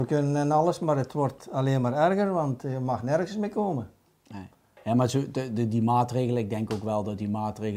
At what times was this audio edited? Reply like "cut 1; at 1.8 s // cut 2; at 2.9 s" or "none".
none

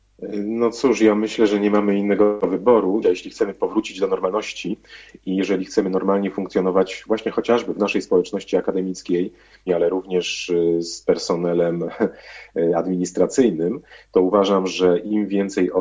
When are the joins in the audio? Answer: cut 1; at 3.0 s // cut 2; at 9.7 s

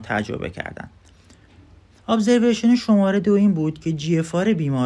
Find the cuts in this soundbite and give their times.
none

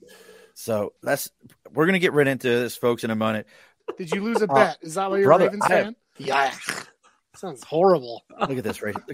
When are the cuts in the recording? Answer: cut 1; at 1.0 s // cut 2; at 3.8 s // cut 3; at 6.2 s

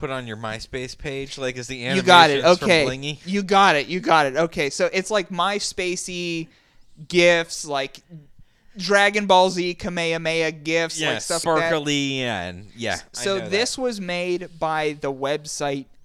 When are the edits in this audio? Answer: cut 1; at 11.4 s

